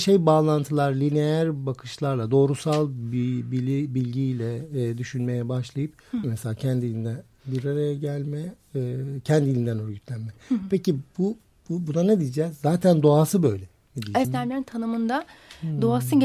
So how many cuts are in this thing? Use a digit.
2